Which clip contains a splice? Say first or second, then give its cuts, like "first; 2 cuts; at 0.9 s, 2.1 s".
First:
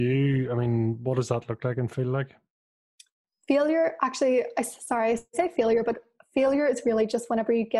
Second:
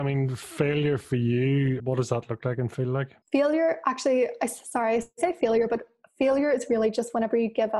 second; 2 cuts; at 1.8 s, 3.2 s